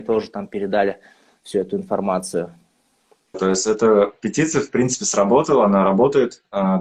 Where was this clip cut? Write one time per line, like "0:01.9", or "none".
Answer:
0:03.3